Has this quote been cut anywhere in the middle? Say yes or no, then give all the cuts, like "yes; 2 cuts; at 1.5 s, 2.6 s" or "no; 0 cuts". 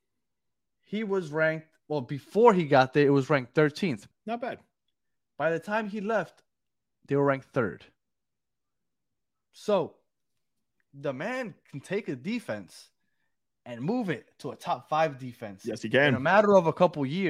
yes; 1 cut; at 4.1 s